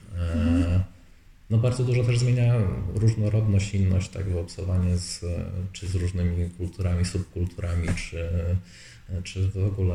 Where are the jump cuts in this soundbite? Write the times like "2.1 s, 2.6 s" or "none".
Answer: none